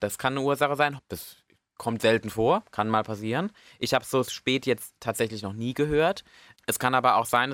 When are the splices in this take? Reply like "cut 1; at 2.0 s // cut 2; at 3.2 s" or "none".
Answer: cut 1; at 1.0 s // cut 2; at 6.5 s